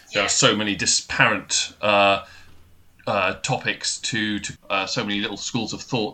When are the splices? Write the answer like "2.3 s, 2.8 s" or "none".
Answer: 4.6 s